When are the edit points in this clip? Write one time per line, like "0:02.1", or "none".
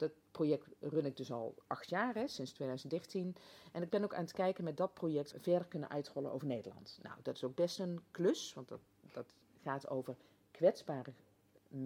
0:05.3